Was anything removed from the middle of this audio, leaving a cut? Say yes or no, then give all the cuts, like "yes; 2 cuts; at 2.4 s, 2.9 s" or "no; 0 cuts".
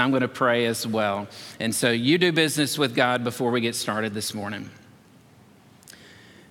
no; 0 cuts